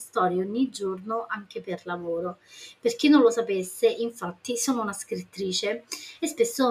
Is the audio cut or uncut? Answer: uncut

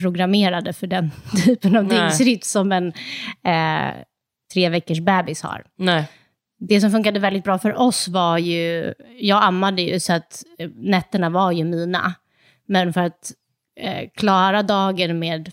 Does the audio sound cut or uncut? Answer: uncut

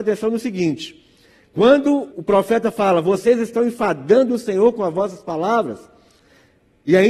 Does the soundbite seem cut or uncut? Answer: cut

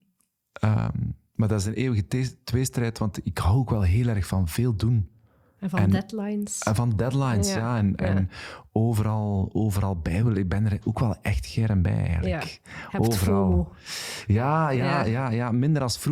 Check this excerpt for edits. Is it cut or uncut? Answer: uncut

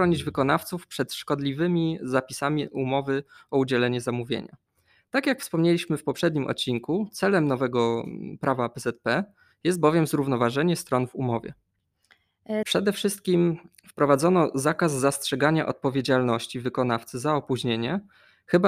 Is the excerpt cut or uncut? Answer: cut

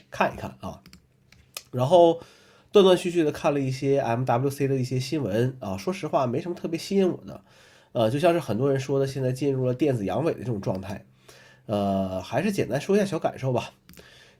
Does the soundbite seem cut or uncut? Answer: uncut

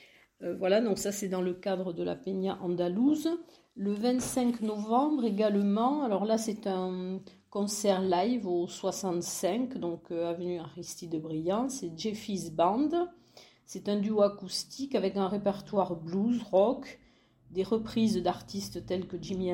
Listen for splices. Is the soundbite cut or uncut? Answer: uncut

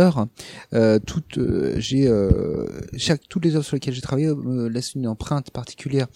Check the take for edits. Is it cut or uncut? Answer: uncut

